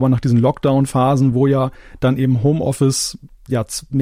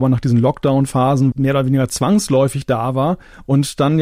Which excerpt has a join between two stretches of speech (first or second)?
second